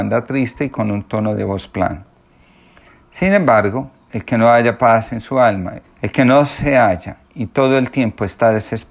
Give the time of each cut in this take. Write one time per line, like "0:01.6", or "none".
0:05.8

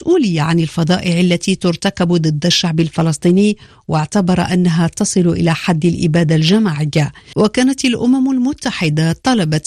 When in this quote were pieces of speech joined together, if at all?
none

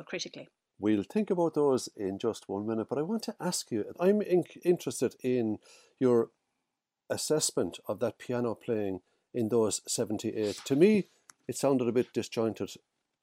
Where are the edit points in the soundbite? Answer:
none

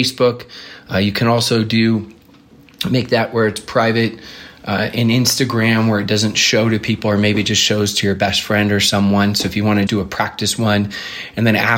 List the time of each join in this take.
0:09.9

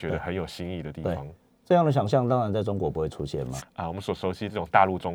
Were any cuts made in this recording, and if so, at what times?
0:03.6

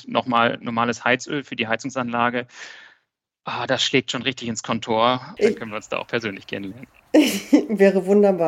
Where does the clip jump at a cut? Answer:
0:05.4

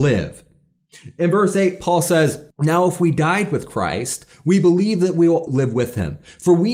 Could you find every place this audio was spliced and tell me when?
0:02.5
0:05.5

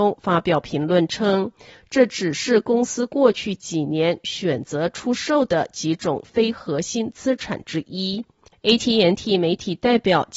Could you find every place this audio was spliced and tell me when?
0:08.5

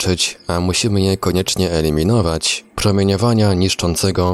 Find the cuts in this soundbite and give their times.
0:02.7

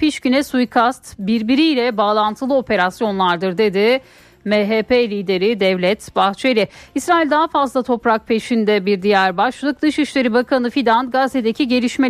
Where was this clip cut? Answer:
none

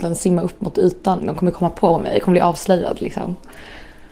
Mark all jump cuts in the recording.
0:01.2

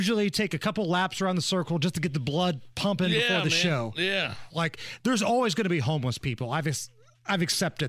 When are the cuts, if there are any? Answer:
0:04.5

